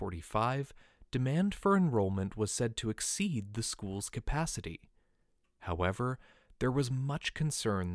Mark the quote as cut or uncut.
uncut